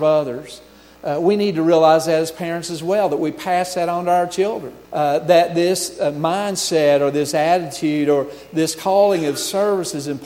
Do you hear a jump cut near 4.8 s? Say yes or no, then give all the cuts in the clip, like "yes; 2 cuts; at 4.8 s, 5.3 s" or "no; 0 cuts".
yes; 1 cut; at 4.8 s